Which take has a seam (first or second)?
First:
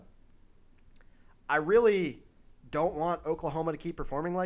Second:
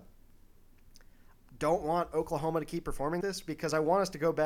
second